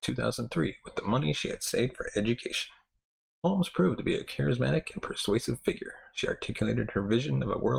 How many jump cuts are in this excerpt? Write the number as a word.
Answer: one